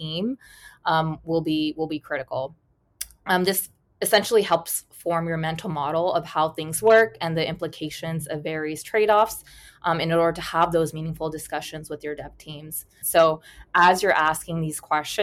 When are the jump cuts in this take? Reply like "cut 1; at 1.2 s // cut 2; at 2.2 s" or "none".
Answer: cut 1; at 13.0 s